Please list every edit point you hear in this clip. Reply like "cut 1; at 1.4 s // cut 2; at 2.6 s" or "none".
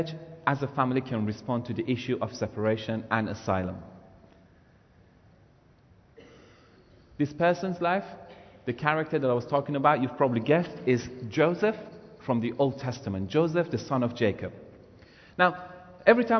none